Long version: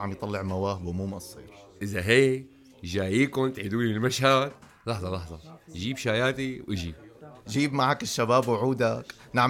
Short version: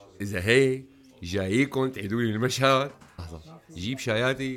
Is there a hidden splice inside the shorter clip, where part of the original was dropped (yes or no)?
yes